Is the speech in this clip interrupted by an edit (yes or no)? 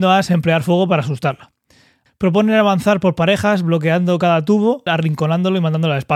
yes